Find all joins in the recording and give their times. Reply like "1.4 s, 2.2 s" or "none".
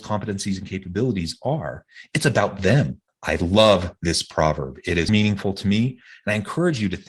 3.1 s, 5.1 s